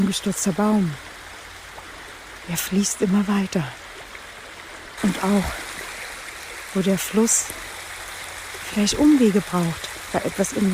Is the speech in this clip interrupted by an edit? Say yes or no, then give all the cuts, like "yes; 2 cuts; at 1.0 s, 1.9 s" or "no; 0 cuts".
yes; 1 cut; at 5.0 s